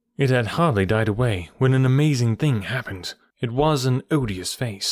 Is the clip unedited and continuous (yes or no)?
no